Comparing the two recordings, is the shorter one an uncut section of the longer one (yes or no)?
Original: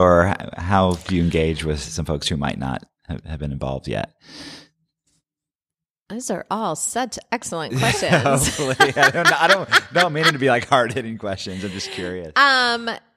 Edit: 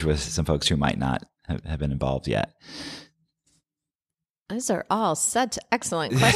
yes